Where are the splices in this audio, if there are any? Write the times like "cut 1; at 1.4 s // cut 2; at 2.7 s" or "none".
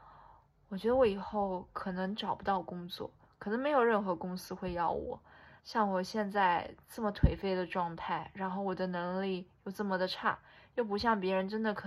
cut 1; at 5.6 s